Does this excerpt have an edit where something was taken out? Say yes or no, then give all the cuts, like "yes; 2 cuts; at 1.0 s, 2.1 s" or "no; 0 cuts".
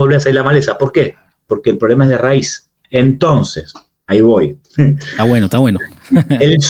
no; 0 cuts